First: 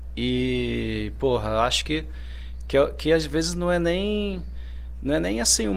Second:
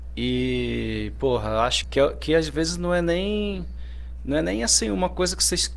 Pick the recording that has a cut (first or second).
second